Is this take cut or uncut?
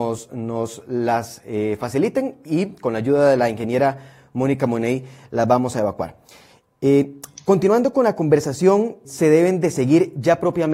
cut